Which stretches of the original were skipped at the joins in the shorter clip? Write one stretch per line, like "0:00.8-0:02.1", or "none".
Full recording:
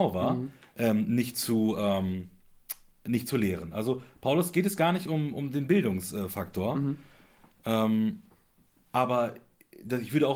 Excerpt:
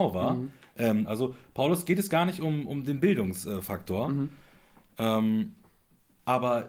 0:01.0-0:03.7